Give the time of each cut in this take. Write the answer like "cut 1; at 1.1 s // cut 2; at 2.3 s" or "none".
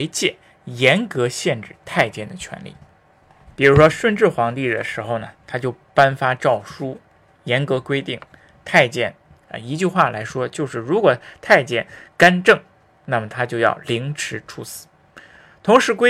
cut 1; at 9.3 s